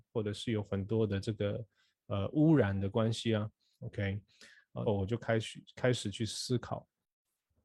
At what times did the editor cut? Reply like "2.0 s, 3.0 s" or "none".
3.7 s, 4.9 s